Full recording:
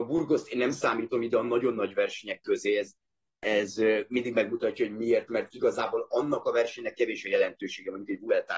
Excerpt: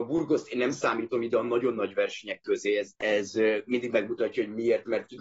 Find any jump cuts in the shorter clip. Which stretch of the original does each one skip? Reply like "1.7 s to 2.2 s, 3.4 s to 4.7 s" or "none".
3.0 s to 3.4 s